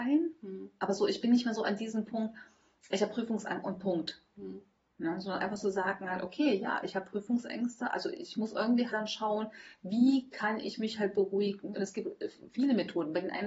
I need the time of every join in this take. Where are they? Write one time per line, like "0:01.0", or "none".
0:08.9
0:11.7